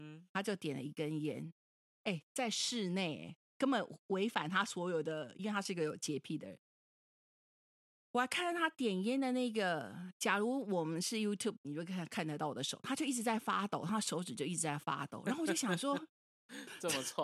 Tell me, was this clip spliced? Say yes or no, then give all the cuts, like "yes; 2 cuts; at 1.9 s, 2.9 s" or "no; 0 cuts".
no; 0 cuts